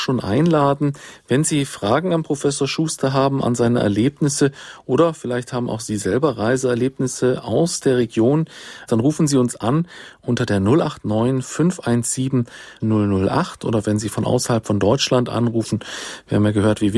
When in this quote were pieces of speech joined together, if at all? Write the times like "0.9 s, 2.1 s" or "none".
8.9 s, 12.8 s